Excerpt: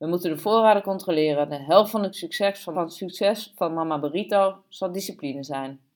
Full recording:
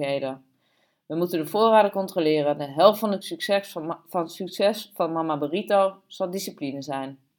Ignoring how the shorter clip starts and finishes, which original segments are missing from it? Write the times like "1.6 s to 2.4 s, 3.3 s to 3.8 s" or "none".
3.8 s to 4.1 s